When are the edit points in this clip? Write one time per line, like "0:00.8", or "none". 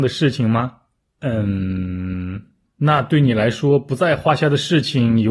0:01.0